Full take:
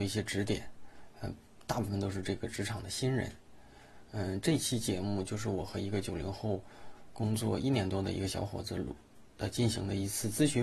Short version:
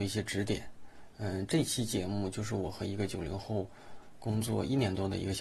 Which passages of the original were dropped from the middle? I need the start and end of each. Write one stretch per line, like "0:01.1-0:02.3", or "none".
0:01.1-0:04.1